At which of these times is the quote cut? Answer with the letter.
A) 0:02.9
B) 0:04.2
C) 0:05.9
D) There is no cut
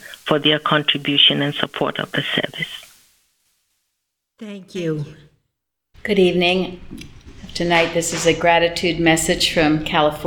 C